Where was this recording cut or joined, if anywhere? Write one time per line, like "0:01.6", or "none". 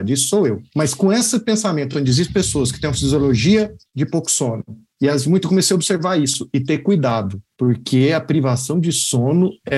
none